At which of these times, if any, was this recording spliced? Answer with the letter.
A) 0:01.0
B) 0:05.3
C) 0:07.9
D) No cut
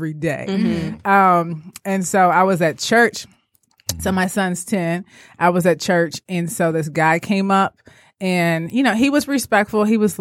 D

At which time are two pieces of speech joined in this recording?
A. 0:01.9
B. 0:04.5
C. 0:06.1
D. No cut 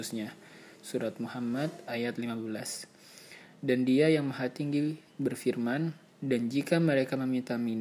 D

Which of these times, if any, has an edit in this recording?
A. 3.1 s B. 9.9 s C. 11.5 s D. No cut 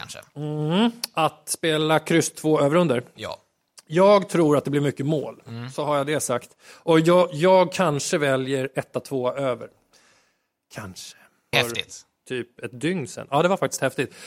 C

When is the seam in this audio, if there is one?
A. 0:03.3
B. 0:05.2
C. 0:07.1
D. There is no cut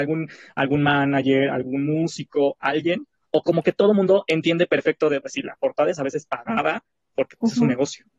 B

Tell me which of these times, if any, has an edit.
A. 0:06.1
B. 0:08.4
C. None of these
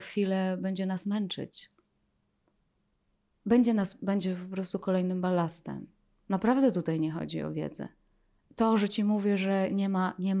B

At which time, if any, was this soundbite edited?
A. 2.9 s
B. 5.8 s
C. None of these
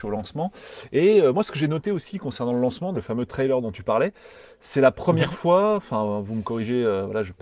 A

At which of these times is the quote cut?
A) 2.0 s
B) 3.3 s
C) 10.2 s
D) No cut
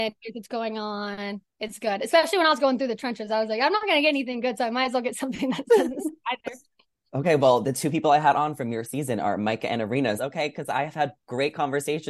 C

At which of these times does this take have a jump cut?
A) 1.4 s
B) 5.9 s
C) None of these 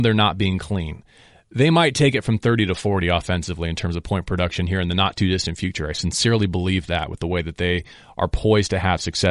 C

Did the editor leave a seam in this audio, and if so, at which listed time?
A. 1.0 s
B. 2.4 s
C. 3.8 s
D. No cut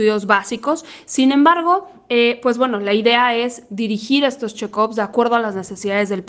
D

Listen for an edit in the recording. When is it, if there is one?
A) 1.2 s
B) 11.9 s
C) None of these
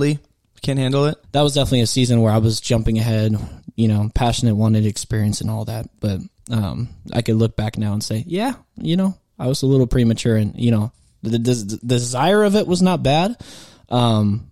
A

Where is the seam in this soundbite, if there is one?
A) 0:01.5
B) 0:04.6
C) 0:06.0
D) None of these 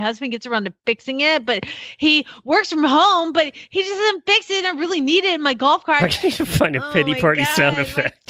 C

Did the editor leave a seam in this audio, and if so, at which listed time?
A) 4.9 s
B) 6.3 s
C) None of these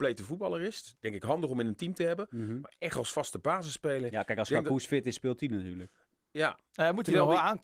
C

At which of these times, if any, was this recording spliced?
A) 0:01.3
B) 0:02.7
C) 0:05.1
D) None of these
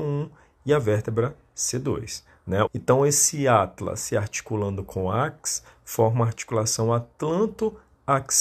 B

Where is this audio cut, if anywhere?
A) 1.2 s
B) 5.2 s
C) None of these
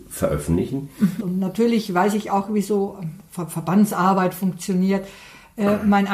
A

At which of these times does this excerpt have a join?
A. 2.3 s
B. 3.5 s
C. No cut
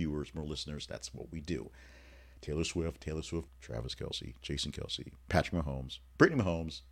B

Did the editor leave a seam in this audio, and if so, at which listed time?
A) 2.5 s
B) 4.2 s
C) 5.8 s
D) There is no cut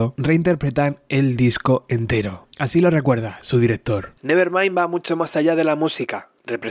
D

